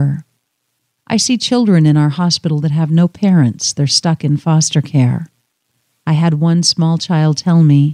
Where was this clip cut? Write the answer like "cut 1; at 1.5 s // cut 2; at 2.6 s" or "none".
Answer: none